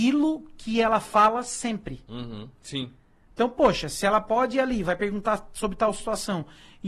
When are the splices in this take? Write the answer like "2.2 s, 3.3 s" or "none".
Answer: none